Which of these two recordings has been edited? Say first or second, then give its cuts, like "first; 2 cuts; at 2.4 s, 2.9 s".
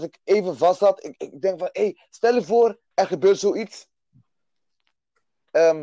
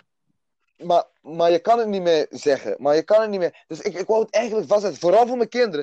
first; 2 cuts; at 1.2 s, 2.9 s